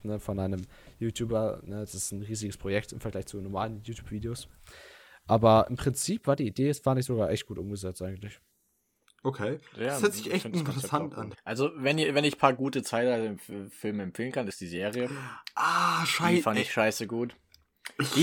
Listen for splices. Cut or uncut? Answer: cut